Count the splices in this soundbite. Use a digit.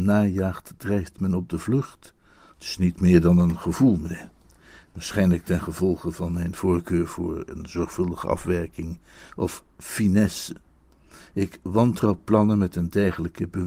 1